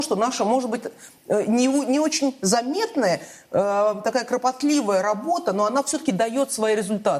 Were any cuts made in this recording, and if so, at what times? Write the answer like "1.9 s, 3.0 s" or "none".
none